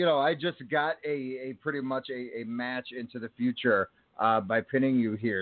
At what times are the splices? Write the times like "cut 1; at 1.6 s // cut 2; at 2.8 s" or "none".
none